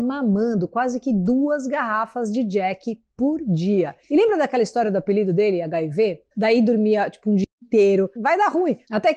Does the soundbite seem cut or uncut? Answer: cut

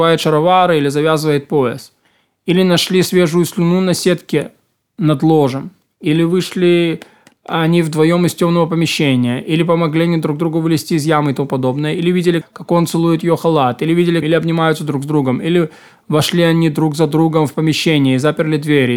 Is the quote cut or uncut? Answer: cut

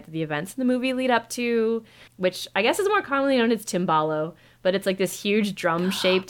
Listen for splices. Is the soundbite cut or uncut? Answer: cut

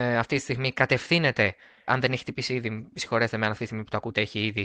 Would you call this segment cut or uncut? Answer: cut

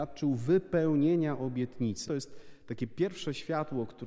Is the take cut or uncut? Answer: cut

